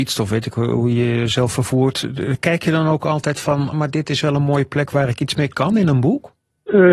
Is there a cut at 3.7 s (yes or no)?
yes